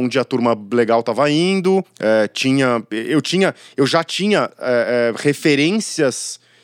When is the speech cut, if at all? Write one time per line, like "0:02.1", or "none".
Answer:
none